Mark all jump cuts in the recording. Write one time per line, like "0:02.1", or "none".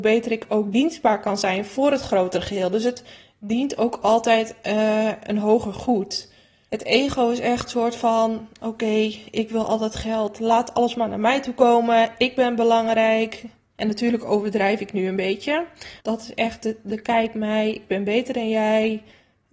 0:06.7
0:13.7
0:16.0